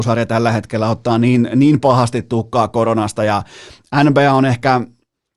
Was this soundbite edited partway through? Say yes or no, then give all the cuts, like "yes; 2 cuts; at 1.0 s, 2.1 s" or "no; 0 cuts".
no; 0 cuts